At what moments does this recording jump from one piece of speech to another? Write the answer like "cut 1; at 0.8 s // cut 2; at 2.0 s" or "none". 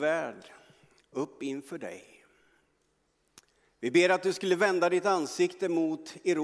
none